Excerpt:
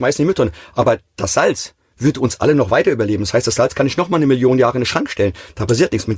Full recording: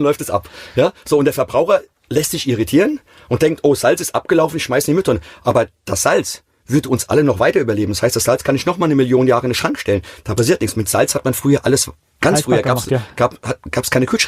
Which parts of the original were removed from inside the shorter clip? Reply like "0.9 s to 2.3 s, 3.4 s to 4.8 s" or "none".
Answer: none